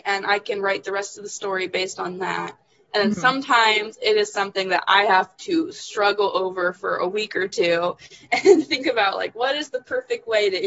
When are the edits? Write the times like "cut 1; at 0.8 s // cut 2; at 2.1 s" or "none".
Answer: none